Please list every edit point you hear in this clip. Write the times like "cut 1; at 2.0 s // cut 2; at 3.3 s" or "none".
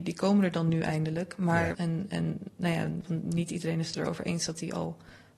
cut 1; at 1.7 s // cut 2; at 3.0 s